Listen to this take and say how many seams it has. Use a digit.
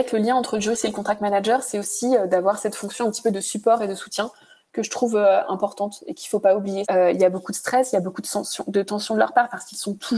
1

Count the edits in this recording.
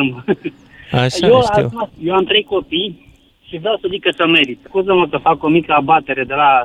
2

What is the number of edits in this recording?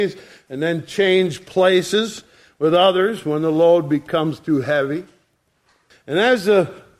1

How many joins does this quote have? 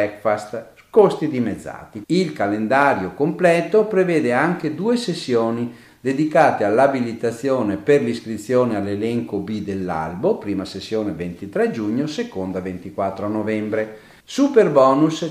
2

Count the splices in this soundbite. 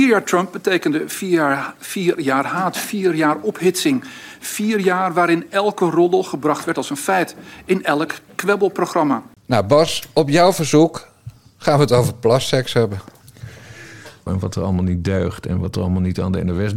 2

